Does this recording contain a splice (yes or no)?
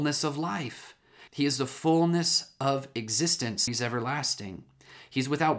yes